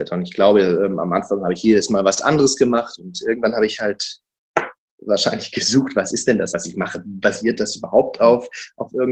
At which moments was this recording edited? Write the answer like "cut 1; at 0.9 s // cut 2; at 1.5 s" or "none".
cut 1; at 3.0 s // cut 2; at 6.5 s